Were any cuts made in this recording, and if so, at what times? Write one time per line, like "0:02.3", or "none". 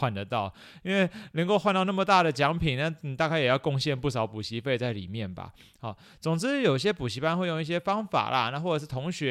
none